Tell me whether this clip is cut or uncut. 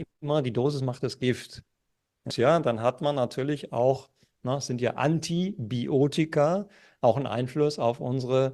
cut